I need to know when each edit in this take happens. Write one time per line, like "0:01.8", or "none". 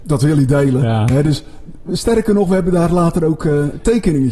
none